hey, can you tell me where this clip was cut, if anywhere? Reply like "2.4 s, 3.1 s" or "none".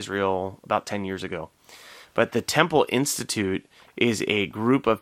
2.0 s